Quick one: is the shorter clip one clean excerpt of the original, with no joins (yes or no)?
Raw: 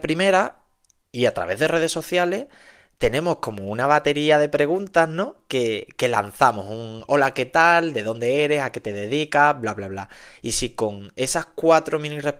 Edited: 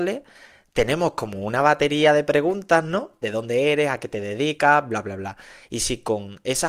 no